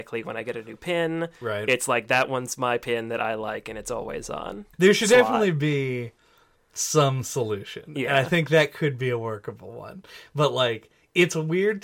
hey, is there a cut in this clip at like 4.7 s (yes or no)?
yes